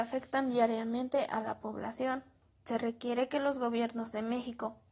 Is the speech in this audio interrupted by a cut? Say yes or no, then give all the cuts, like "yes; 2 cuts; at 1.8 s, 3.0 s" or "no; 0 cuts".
yes; 1 cut; at 2.6 s